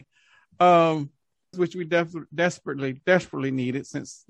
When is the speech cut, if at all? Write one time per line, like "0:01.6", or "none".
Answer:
0:01.5